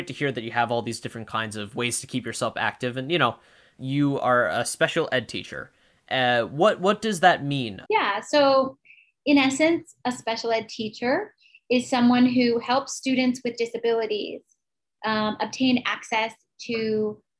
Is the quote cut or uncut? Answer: cut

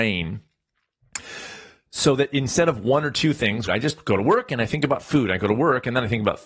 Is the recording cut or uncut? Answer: cut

